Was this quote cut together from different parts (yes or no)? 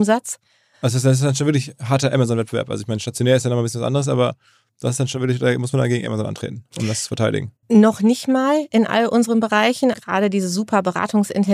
yes